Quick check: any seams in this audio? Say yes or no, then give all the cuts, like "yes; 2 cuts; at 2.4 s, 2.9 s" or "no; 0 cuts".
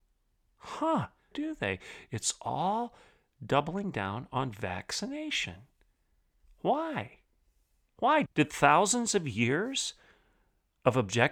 yes; 2 cuts; at 1.3 s, 8.3 s